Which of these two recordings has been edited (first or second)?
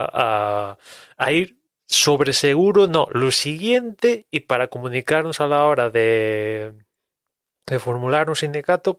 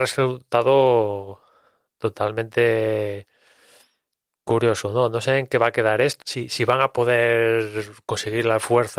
second